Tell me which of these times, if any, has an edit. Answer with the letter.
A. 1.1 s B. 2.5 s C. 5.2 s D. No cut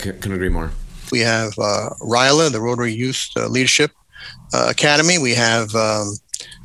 A